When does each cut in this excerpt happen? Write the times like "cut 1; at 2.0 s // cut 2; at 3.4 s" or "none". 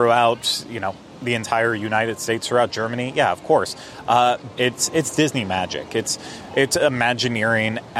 cut 1; at 4.6 s